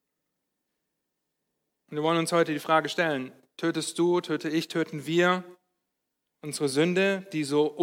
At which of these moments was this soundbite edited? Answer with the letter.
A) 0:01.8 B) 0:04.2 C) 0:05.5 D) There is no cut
D